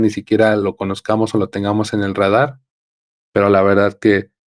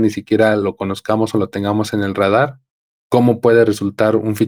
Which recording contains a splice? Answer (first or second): second